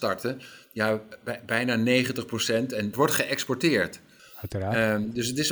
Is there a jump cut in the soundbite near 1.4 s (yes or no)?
no